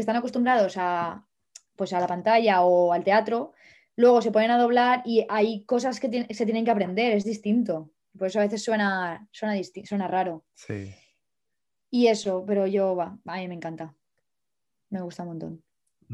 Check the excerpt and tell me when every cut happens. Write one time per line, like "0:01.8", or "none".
none